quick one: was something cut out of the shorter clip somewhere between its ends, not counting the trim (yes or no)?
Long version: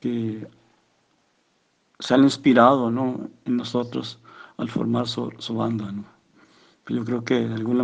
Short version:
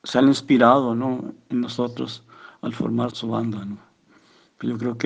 yes